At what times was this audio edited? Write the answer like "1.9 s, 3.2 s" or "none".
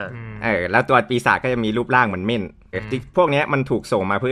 2.7 s